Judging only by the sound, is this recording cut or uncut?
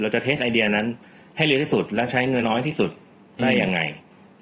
cut